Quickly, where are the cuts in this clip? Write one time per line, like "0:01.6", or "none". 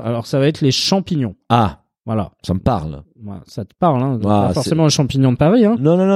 none